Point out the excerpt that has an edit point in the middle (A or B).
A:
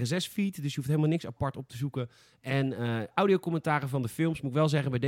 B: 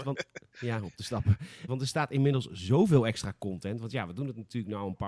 B